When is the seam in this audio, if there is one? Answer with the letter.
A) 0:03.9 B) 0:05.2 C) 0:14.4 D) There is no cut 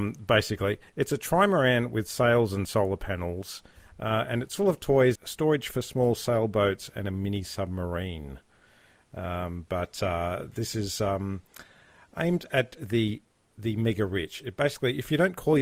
B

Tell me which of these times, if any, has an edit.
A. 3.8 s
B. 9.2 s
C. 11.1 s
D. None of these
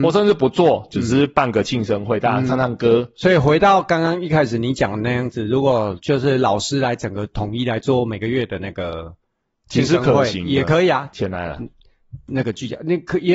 C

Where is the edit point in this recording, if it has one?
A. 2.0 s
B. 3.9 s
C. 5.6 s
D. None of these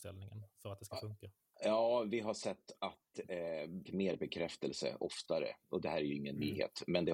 B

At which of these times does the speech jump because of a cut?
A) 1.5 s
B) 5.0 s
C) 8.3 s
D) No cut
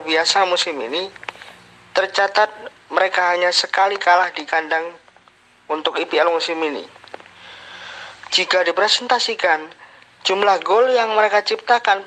C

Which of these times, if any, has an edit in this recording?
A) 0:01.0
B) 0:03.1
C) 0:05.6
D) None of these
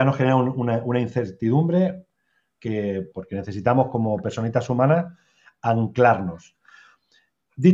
B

